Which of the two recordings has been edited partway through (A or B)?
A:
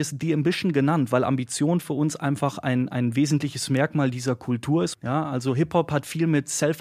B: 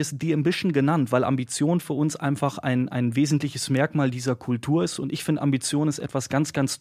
A